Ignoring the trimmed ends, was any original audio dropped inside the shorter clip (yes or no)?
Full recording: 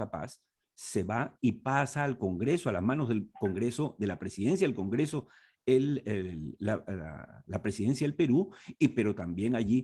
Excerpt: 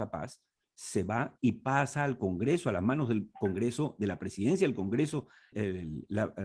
yes